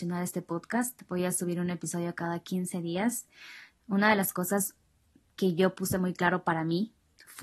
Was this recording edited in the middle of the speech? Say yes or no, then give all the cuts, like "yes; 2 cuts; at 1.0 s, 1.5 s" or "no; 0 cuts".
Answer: no; 0 cuts